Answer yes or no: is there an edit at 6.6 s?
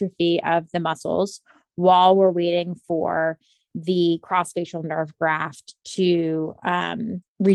no